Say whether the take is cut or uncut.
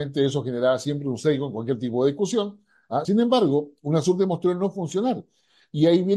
cut